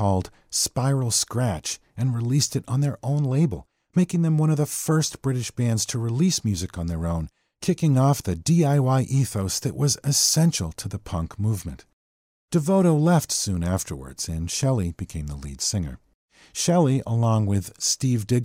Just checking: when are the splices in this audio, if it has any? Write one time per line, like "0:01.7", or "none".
none